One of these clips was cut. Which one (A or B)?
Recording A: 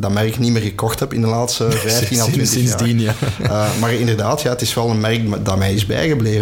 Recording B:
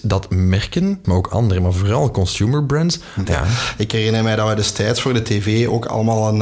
B